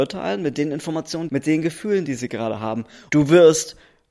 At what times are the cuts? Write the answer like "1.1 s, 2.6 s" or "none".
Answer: 1.3 s, 3.1 s